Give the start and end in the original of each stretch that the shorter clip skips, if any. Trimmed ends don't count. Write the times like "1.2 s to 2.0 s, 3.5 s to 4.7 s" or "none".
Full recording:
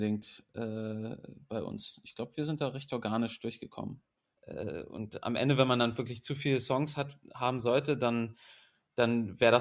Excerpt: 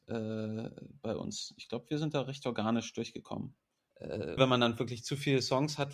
4.8 s to 5.6 s